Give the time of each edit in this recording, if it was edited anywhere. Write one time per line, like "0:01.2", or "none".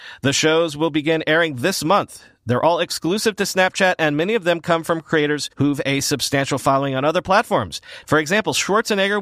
0:05.5
0:08.0